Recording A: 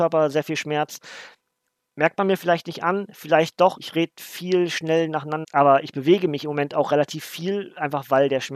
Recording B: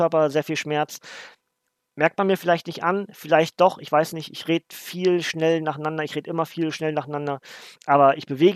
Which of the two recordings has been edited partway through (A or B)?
A